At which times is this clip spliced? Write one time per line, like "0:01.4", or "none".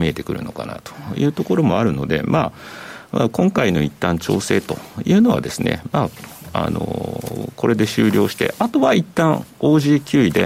none